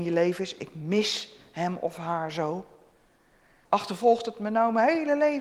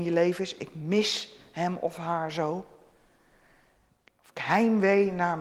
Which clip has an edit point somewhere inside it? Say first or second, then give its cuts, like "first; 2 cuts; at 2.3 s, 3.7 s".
first; 1 cut; at 3.7 s